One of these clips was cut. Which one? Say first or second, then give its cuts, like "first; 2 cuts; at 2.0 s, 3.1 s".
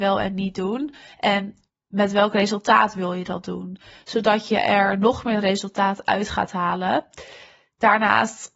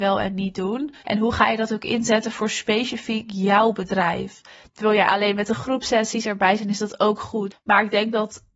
second; 3 cuts; at 1.0 s, 4.6 s, 7.5 s